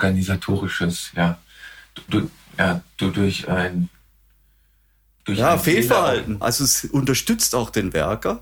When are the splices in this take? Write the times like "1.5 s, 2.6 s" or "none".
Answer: 6.4 s